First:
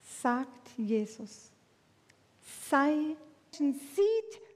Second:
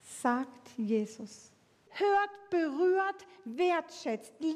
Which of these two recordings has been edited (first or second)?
second